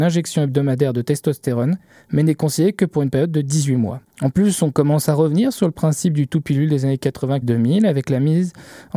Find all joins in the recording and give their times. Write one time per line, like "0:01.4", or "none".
0:04.1
0:07.4